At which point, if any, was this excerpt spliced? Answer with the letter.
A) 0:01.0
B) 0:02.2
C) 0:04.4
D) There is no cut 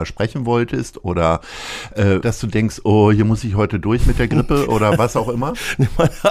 B